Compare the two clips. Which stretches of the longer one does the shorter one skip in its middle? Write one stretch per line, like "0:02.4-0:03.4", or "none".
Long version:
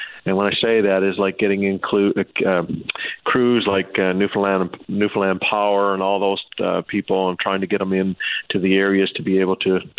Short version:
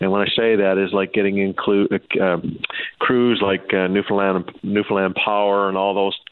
none